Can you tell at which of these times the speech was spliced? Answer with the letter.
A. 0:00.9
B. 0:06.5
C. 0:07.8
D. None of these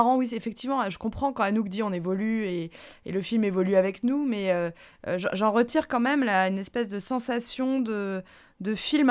D